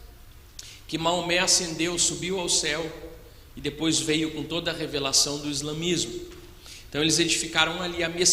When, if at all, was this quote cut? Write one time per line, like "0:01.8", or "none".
none